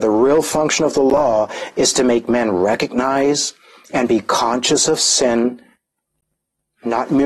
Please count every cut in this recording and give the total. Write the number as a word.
zero